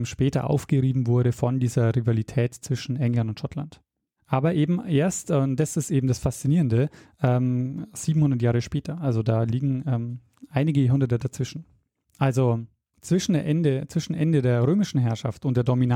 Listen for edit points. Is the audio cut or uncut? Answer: uncut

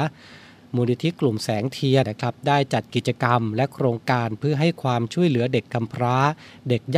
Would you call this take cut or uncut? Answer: cut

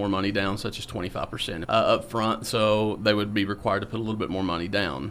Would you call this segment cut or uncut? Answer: cut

